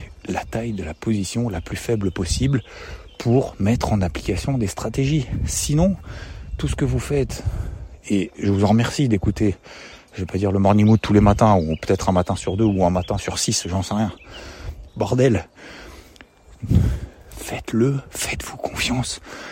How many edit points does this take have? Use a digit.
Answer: 2